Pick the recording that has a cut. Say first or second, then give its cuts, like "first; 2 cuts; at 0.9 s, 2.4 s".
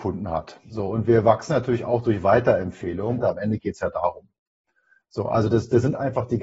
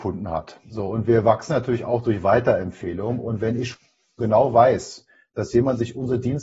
first; 2 cuts; at 3.2 s, 5.0 s